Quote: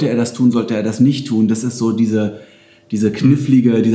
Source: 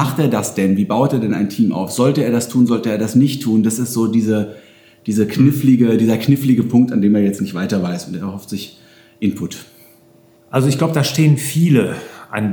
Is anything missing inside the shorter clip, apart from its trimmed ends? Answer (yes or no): no